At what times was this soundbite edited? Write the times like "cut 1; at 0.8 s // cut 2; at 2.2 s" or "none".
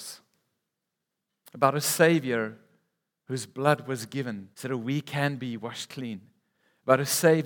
cut 1; at 4.5 s

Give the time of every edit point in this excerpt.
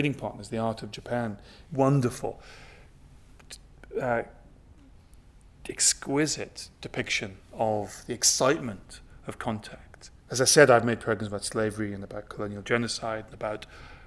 cut 1; at 1.6 s // cut 2; at 10.2 s

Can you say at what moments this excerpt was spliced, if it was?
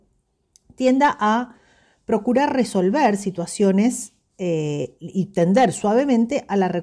cut 1; at 5.0 s

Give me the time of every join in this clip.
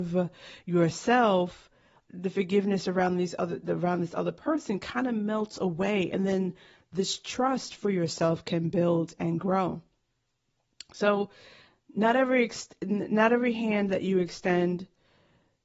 cut 1; at 2.1 s

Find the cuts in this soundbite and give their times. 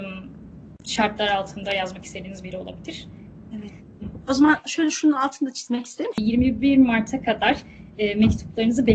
cut 1; at 3.5 s // cut 2; at 6.1 s

